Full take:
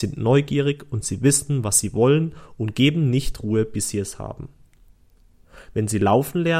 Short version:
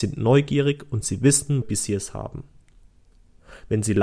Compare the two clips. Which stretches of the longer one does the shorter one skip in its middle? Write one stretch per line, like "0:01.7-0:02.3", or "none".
0:01.6-0:03.7